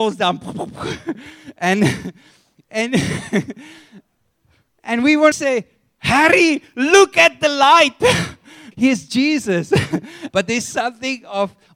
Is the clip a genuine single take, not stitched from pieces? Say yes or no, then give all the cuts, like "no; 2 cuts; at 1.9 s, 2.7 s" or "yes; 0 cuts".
no; 3 cuts; at 5.3 s, 8.7 s, 10.3 s